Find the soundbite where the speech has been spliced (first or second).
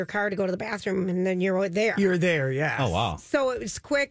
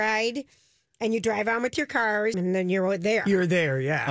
second